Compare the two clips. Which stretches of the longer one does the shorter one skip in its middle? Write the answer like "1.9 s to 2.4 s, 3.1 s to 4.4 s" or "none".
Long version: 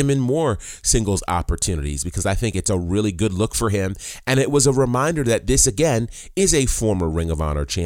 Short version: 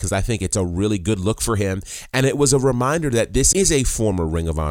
5.7 s to 6.3 s